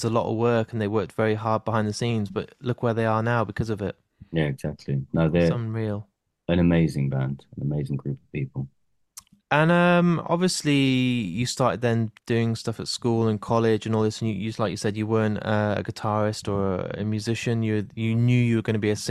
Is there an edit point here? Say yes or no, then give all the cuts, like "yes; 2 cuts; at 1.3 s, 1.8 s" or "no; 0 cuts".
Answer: no; 0 cuts